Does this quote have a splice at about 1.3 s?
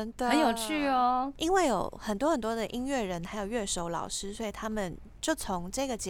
yes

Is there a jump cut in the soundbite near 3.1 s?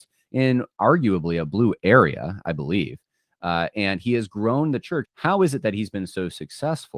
no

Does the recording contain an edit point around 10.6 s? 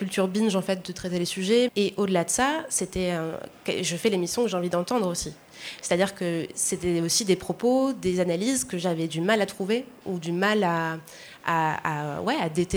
no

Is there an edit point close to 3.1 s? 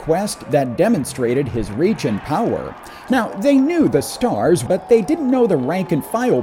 yes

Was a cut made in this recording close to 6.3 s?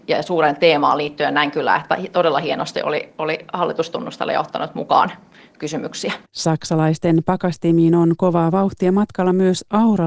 yes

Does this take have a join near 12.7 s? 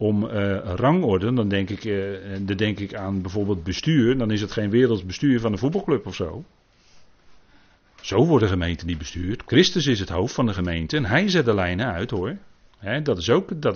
yes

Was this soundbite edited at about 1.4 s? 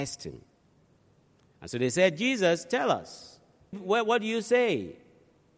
no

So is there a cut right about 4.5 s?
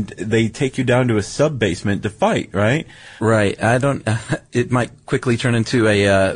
no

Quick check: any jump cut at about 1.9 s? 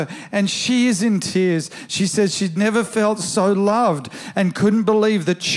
no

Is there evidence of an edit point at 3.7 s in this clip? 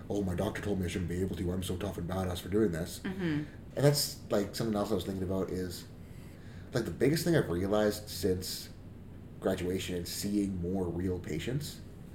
yes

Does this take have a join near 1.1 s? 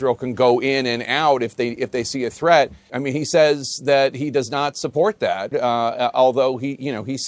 no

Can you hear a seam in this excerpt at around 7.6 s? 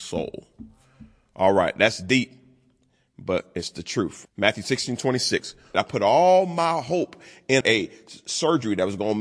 yes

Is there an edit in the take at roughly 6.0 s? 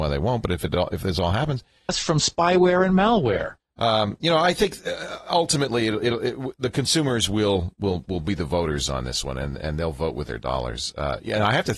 no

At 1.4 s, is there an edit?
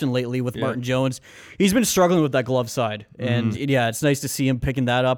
no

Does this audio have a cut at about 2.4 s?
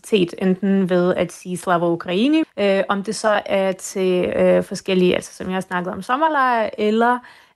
yes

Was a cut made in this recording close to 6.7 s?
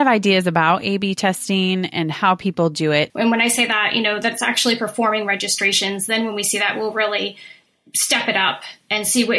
no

